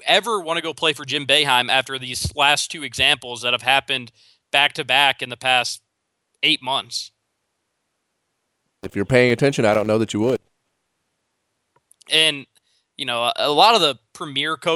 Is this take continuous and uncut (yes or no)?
yes